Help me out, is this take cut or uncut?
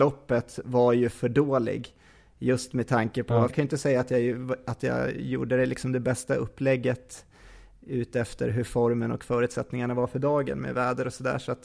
cut